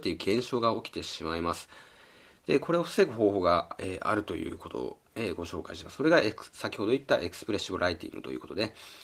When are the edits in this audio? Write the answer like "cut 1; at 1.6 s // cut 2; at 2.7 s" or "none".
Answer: none